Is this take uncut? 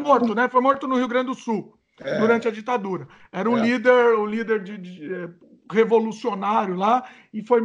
yes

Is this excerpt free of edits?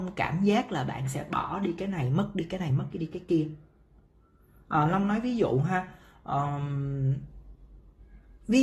yes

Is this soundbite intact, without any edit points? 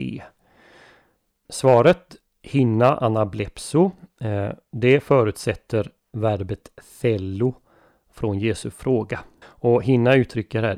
no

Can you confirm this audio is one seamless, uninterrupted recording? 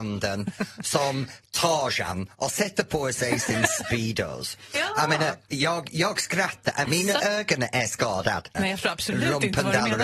no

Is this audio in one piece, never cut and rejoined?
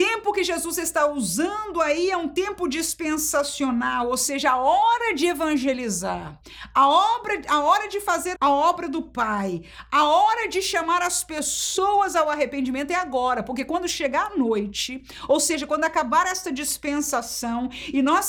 no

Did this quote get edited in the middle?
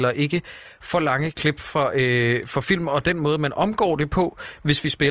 no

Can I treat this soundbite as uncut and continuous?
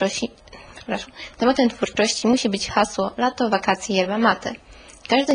yes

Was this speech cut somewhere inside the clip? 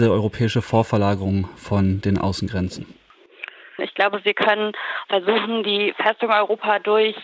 yes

